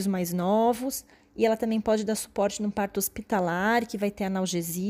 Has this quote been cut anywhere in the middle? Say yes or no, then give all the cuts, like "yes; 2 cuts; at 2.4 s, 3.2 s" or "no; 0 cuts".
no; 0 cuts